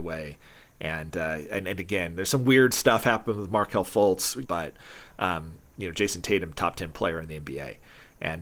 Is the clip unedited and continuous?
no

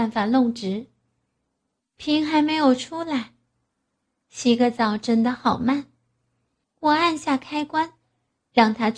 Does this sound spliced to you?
yes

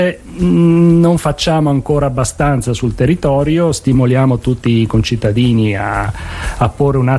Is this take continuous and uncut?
yes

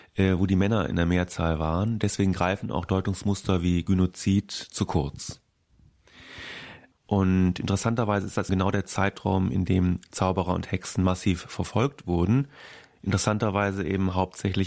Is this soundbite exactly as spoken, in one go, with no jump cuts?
no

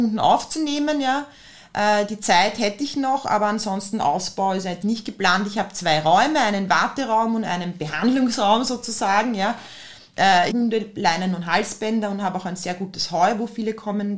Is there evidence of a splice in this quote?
yes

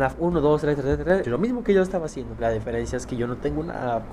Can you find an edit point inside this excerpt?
yes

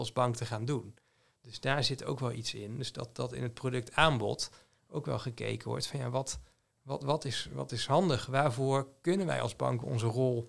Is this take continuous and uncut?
yes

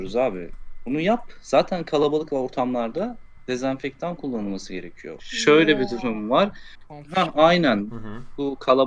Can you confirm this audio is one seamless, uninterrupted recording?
no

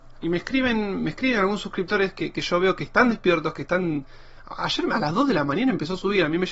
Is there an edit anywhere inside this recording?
no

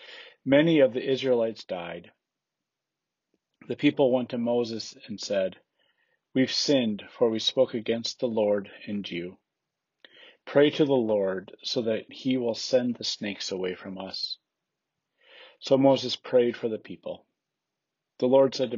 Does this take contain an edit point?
no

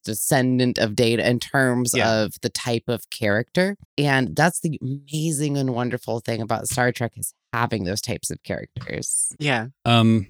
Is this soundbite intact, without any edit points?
no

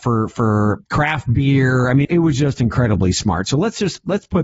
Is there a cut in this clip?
yes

